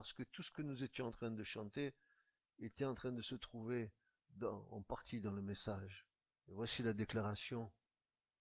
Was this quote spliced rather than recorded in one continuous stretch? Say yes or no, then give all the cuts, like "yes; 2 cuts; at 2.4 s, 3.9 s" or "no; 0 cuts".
yes; 1 cut; at 6.4 s